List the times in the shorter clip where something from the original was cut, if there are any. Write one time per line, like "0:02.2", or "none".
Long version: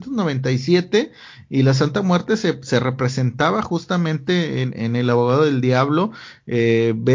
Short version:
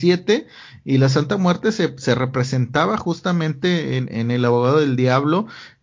none